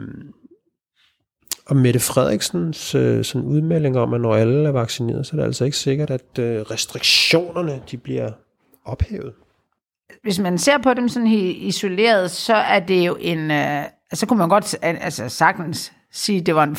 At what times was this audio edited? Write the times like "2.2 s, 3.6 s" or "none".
none